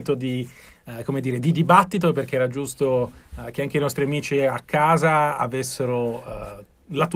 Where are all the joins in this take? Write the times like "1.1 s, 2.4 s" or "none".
none